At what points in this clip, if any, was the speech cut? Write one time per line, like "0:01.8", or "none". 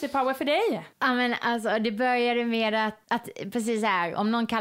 0:00.9
0:03.0